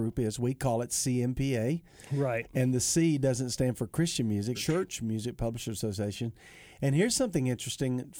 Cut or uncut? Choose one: cut